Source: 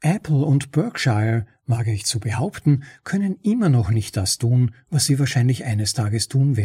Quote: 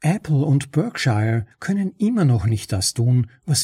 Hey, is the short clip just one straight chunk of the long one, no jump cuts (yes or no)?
no